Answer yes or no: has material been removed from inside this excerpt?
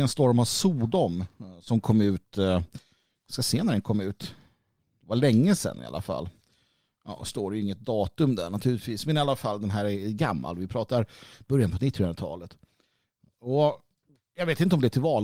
no